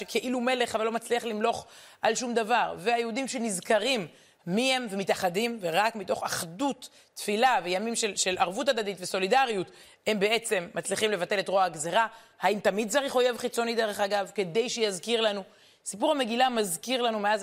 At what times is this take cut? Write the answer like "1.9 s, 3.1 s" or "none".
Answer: none